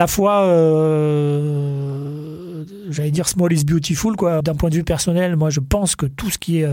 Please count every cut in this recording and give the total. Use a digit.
1